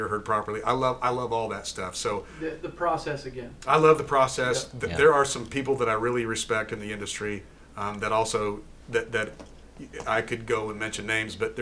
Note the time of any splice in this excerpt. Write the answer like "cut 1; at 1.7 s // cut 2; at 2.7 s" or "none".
none